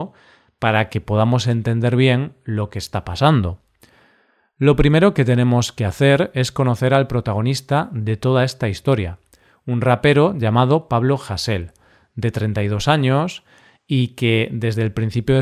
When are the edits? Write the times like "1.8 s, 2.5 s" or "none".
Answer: none

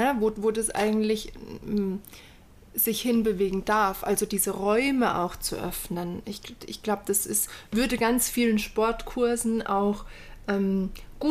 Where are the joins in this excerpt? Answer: none

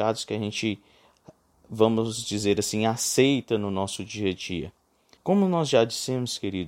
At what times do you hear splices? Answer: 5.2 s

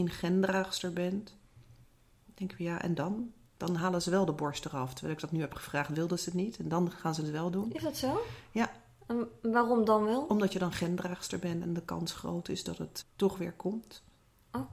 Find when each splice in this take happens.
13.0 s

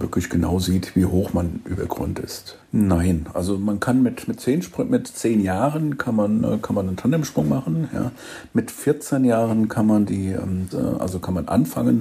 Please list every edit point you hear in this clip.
2.6 s, 10.7 s

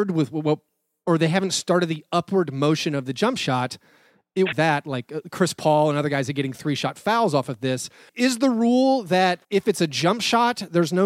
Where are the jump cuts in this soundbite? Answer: 4.5 s, 8.1 s, 9.4 s

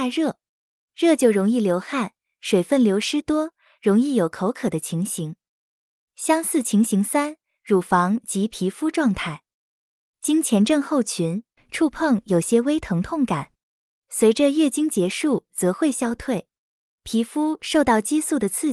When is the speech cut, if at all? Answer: 11.6 s

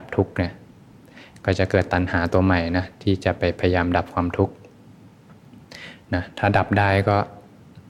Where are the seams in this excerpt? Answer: none

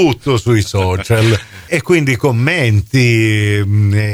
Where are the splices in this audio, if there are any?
1.7 s

